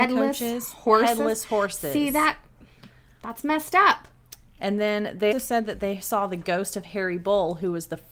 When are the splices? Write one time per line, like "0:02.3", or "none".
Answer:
0:05.3